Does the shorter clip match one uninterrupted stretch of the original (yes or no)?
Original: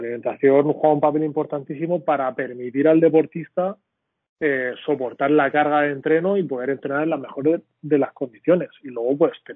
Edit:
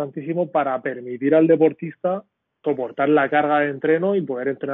no